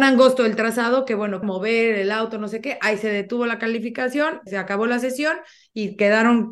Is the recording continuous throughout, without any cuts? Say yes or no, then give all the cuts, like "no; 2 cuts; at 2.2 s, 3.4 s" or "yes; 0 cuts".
no; 2 cuts; at 1.4 s, 4.5 s